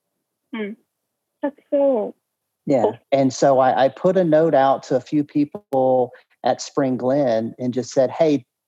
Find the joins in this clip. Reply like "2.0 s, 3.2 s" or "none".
3.0 s